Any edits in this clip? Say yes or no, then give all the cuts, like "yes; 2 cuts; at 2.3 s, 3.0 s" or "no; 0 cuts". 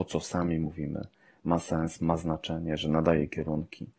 no; 0 cuts